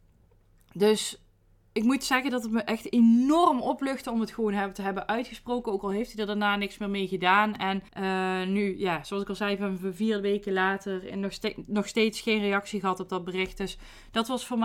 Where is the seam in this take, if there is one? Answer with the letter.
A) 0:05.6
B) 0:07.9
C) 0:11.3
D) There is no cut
B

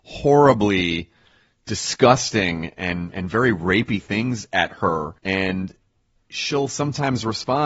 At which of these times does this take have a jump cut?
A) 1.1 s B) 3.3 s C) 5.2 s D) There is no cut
C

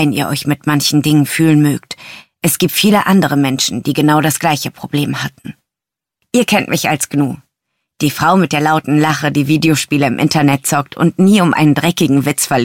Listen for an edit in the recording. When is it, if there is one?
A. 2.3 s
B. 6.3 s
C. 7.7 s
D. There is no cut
D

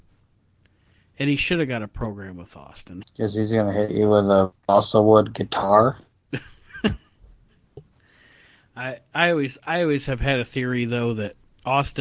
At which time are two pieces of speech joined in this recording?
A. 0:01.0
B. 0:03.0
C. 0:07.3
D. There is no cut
B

